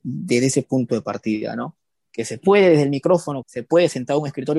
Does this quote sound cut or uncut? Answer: cut